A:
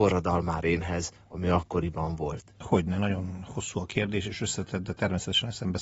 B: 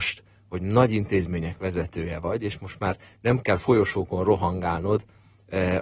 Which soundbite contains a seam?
A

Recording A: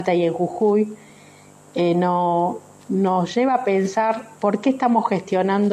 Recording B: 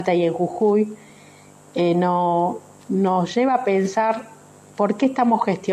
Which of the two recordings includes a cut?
A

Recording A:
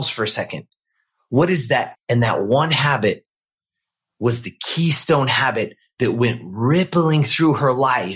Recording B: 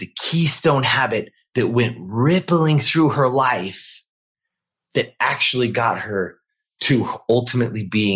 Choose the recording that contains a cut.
A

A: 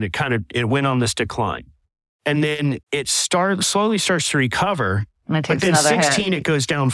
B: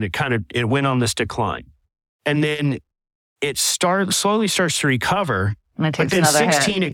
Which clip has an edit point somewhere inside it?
A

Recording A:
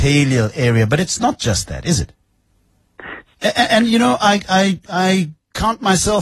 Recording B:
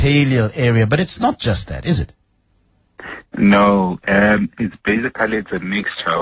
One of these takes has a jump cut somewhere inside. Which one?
A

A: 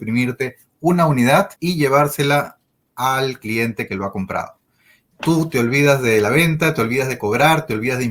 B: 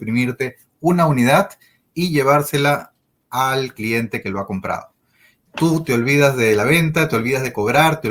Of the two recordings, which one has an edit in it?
A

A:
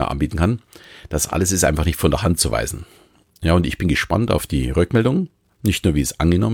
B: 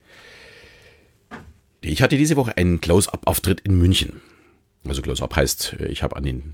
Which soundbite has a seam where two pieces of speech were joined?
B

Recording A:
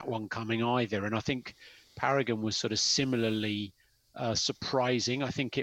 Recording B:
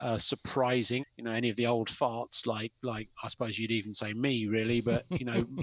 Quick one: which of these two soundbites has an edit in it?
B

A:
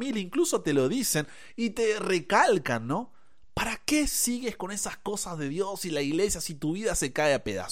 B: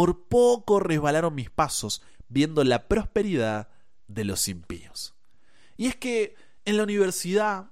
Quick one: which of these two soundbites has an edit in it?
B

